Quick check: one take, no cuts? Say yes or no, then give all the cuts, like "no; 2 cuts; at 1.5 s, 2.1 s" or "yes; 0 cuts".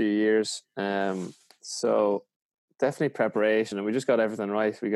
yes; 0 cuts